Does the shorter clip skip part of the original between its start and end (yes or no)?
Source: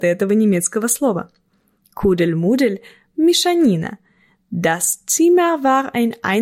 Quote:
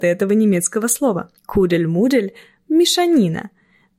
yes